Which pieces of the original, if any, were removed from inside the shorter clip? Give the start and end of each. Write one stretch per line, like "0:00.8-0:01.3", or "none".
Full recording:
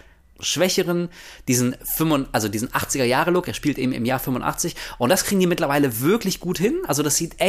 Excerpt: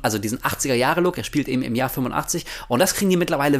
none